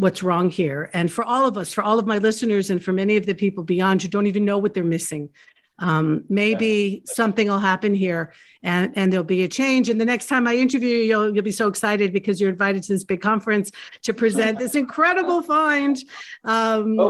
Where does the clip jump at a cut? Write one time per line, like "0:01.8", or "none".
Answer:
none